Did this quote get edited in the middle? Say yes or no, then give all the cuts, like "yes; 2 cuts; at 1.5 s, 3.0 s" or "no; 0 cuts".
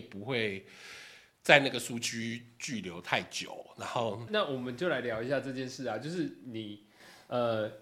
yes; 1 cut; at 4.3 s